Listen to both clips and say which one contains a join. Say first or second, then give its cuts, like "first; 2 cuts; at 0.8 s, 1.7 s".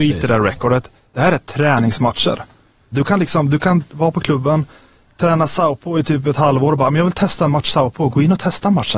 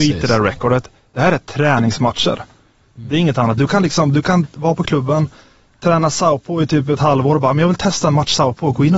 first; 1 cut; at 2.9 s